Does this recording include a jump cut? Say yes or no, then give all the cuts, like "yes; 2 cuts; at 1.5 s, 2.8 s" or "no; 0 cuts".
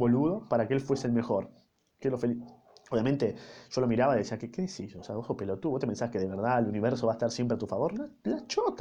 no; 0 cuts